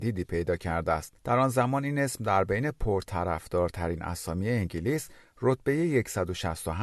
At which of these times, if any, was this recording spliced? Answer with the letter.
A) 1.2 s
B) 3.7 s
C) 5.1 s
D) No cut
A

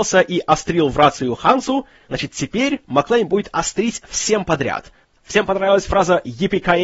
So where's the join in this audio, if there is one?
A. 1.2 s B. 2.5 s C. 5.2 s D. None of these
C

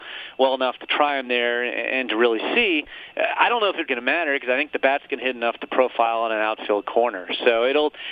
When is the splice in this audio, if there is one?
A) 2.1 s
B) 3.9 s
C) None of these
B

